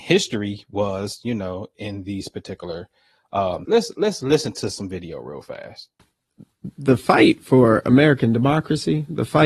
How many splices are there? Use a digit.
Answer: 1